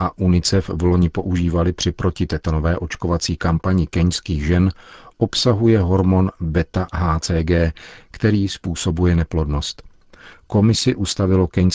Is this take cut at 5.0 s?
no; 1 cut; at 10.3 s

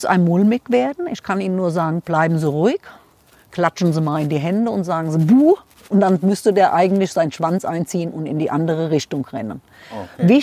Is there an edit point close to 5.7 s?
no; 0 cuts

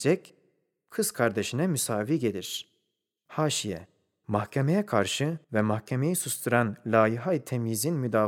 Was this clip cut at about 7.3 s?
no; 2 cuts; at 3.2 s, 5.4 s

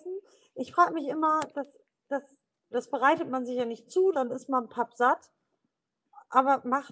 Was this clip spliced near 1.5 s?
no; 2 cuts; at 2.7 s, 4.1 s

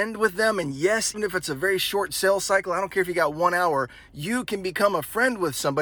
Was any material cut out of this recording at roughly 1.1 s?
yes; 1 cut; at 1.1 s

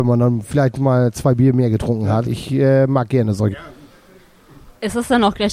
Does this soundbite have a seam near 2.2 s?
yes; 2 cuts; at 2.2 s, 3.5 s

